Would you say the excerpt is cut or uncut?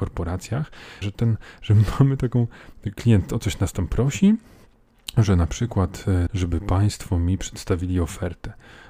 cut